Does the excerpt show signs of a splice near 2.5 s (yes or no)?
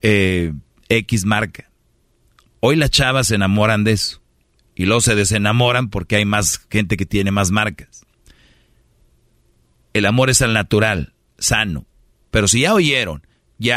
no